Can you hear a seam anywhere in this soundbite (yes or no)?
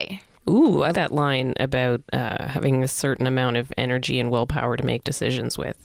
yes